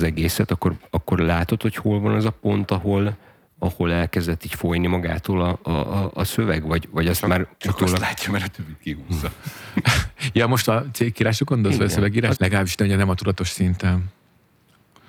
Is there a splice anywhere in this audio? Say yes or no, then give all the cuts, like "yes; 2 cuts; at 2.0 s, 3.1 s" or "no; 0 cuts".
yes; 1 cut; at 12.4 s